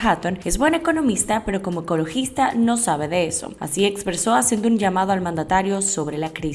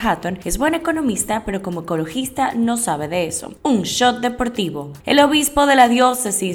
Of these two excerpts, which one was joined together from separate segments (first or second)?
second